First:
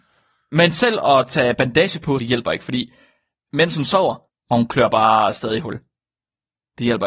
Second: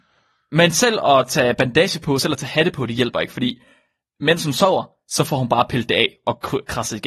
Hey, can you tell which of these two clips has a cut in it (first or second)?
first